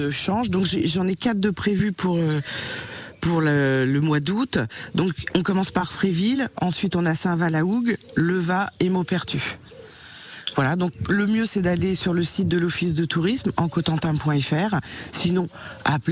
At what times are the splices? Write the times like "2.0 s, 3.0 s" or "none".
none